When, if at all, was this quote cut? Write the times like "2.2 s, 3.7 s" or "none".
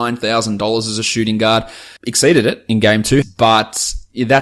2.0 s, 3.2 s